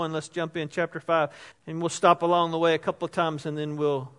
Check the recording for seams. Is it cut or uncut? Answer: cut